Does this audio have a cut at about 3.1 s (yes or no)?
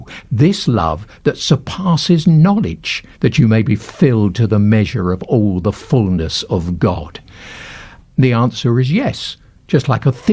yes